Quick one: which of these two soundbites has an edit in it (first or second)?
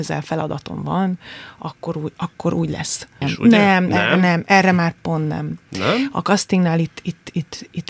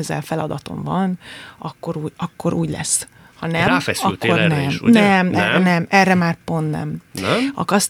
first